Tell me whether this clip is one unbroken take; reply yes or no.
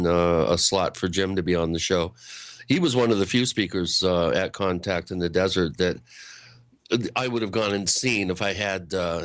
yes